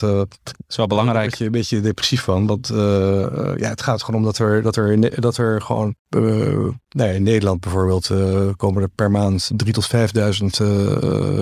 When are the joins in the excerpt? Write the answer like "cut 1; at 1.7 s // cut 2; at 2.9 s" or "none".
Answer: cut 1; at 6.0 s